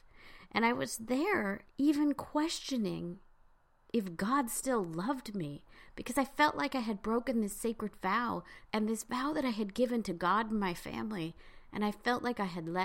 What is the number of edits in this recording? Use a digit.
1